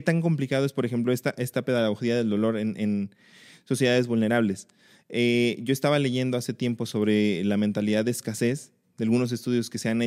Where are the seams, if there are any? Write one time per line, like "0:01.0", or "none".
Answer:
none